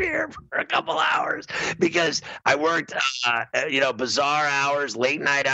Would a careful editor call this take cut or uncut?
uncut